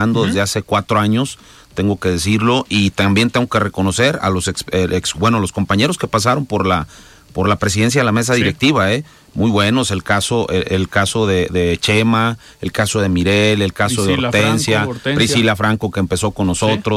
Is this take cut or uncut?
cut